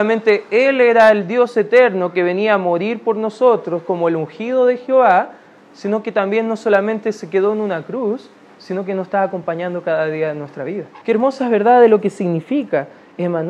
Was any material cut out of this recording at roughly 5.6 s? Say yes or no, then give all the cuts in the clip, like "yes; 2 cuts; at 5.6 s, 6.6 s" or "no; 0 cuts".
no; 1 cut; at 11.0 s